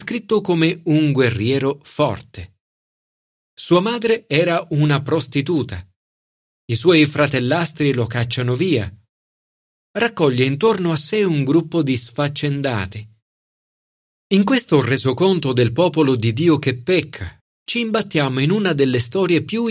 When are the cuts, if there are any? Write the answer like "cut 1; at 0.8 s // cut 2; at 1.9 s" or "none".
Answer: cut 1; at 14.2 s // cut 2; at 17.4 s